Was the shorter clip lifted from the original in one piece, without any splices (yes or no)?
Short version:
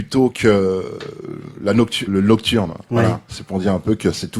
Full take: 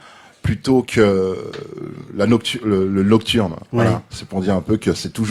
no